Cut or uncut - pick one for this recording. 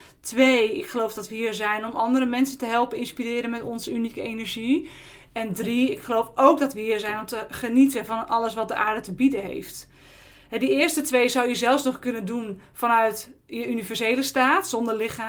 uncut